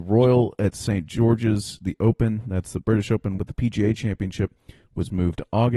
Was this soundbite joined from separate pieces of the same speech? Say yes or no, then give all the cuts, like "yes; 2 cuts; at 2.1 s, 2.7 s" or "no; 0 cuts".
yes; 1 cut; at 3.4 s